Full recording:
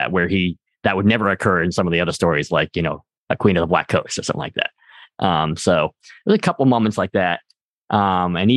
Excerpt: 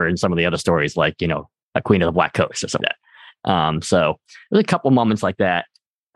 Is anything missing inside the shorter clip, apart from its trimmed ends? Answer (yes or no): yes